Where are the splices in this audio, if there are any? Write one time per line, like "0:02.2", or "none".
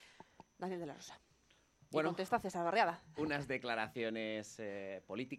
none